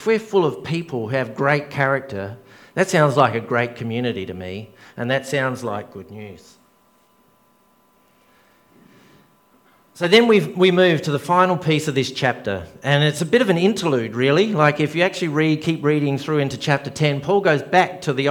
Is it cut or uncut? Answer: uncut